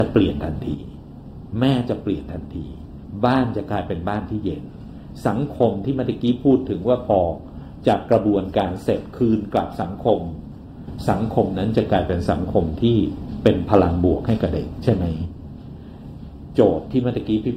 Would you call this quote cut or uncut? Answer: cut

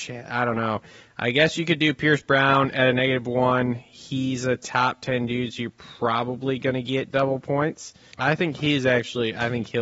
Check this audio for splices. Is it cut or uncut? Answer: cut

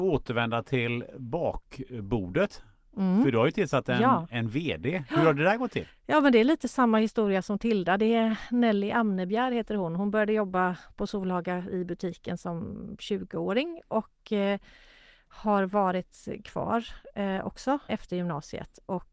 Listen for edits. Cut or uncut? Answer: cut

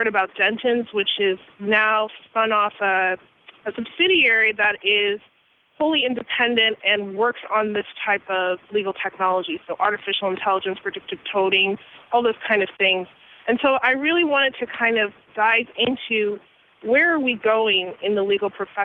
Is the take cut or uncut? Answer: uncut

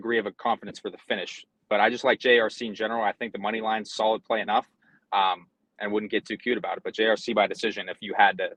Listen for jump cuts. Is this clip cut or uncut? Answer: uncut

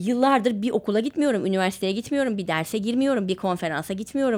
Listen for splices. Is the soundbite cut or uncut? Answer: uncut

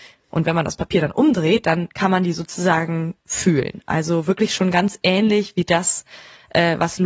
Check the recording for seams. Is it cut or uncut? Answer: uncut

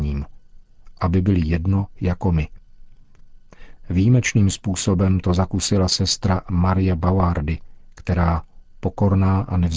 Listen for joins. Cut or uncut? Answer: cut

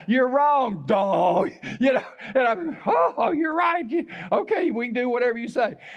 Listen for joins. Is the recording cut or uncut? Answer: uncut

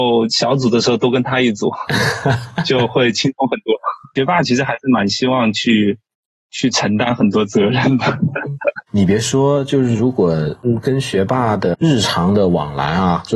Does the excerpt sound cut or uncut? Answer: uncut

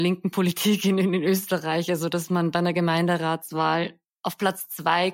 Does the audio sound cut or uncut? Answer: uncut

